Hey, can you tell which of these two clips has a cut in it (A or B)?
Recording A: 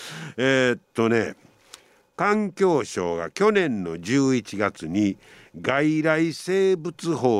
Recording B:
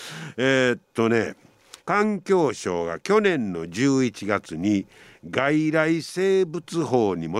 B